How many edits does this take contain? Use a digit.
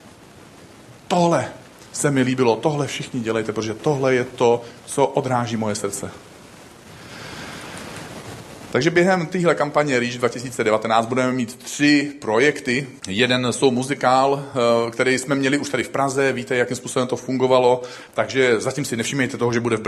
2